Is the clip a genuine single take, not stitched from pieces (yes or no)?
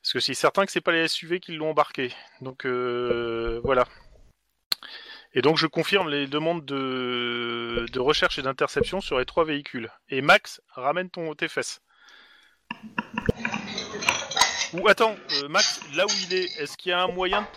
yes